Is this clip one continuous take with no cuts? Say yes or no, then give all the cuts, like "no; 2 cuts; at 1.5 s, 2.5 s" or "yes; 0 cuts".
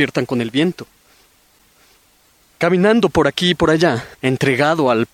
no; 1 cut; at 4.1 s